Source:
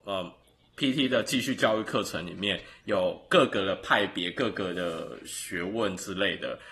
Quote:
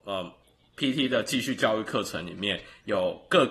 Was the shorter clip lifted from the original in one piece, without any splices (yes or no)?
yes